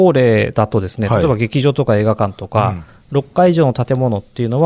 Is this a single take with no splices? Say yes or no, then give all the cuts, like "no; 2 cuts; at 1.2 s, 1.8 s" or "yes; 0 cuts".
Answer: yes; 0 cuts